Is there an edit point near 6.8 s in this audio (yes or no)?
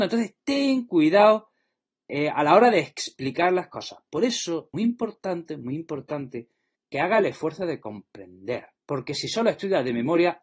yes